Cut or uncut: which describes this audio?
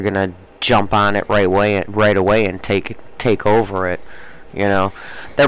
uncut